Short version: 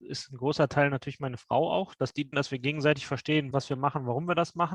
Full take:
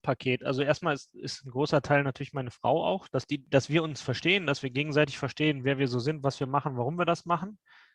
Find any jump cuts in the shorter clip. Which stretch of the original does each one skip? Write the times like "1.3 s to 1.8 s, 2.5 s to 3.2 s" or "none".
3.5 s to 4.4 s, 5.6 s to 6.2 s